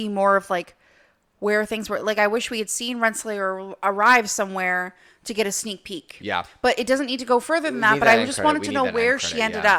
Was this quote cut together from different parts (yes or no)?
no